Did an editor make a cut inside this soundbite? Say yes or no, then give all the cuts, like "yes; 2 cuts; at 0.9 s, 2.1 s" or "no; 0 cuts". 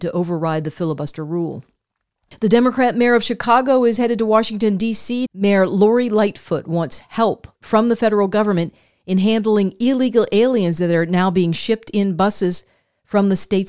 yes; 1 cut; at 5.3 s